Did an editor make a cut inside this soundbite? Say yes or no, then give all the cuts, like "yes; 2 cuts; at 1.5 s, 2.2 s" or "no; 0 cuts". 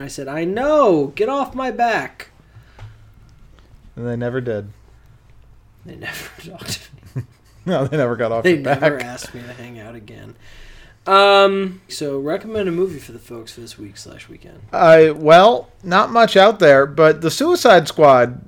yes; 1 cut; at 11.9 s